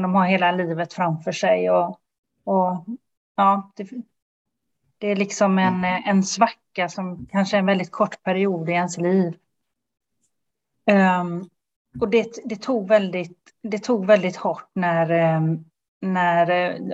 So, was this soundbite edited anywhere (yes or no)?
no